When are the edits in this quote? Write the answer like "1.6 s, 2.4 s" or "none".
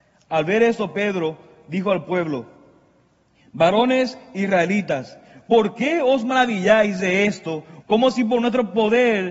7.8 s